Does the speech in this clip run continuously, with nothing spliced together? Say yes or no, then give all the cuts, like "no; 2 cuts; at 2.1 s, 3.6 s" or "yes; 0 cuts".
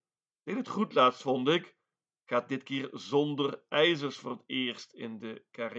yes; 0 cuts